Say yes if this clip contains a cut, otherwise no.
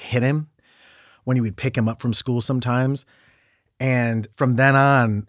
yes